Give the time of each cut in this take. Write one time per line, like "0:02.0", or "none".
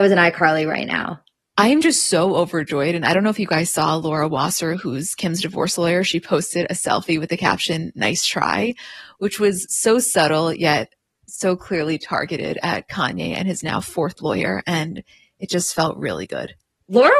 none